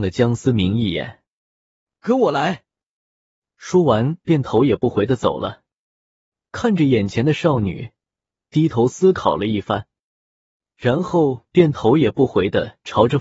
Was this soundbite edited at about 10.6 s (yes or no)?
no